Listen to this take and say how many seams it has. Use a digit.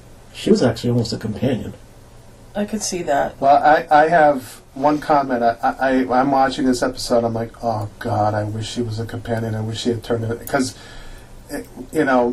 0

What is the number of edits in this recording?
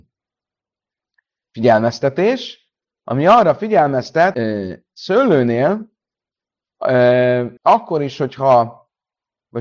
2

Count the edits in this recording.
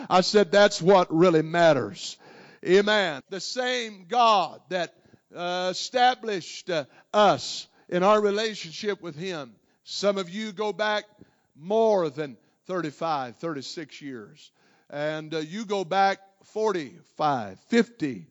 1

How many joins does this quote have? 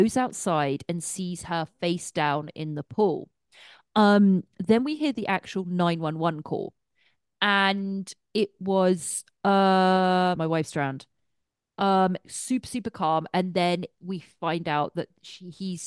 1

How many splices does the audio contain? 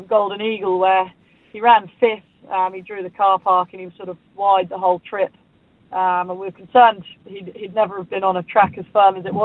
0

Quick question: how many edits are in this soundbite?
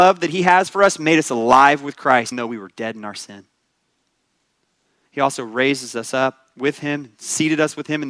2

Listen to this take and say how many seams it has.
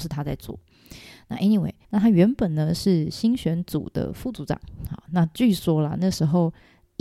1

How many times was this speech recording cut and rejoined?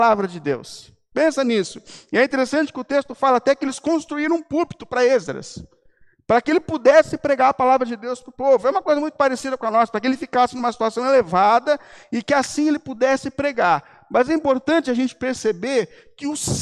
0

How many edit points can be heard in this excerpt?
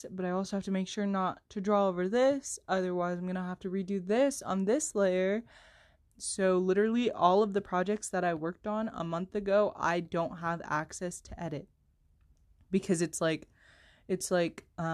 1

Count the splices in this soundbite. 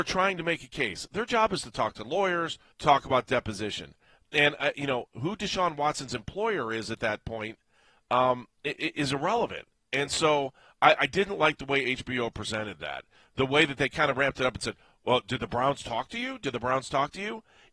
1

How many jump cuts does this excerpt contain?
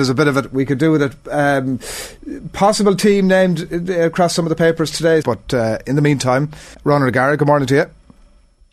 2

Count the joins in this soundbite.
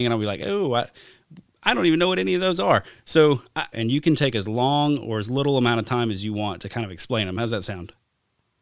1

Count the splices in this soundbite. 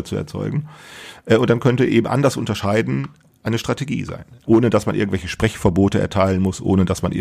0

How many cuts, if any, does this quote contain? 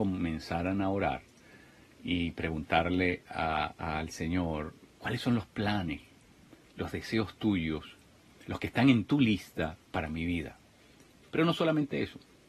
1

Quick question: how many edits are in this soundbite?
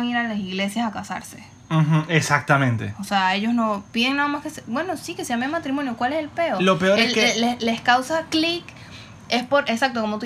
0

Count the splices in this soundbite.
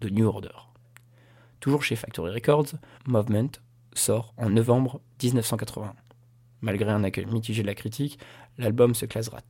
1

